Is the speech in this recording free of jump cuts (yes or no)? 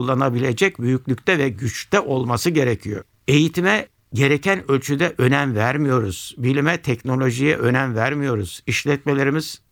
yes